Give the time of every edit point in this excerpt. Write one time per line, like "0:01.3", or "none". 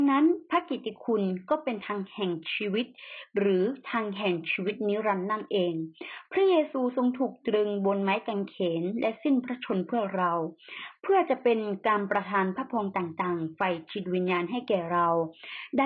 none